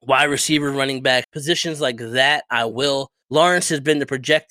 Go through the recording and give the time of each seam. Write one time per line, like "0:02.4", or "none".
0:01.2
0:03.2